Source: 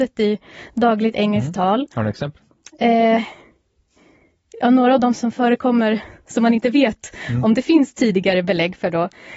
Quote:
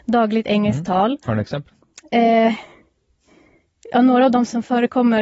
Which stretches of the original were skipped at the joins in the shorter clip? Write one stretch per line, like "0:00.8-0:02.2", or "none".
none